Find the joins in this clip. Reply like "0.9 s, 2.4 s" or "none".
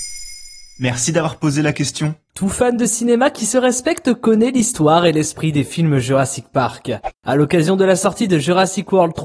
none